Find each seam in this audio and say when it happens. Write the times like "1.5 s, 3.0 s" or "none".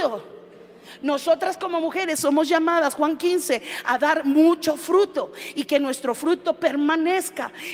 none